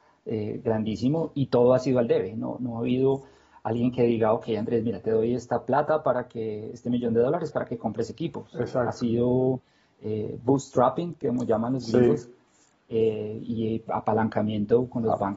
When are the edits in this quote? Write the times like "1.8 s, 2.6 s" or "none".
none